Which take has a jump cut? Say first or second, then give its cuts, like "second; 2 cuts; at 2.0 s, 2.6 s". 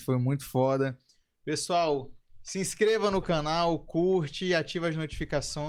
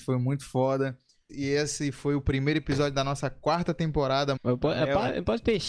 second; 2 cuts; at 1.3 s, 4.4 s